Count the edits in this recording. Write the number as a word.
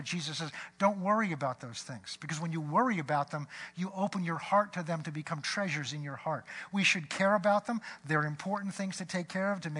zero